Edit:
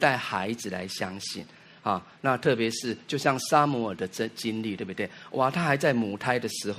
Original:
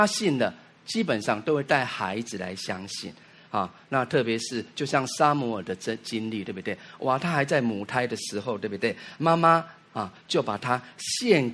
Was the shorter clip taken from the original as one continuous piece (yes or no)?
yes